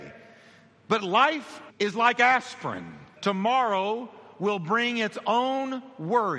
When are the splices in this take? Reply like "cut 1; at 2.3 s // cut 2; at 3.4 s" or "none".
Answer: cut 1; at 1.7 s // cut 2; at 3.2 s